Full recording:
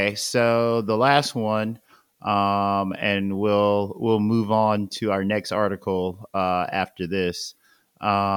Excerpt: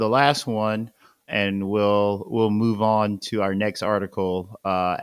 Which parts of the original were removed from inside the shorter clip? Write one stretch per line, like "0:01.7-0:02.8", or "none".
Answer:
0:02.2-0:03.0